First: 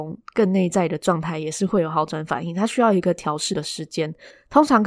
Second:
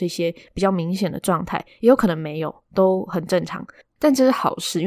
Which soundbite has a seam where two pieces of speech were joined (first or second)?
second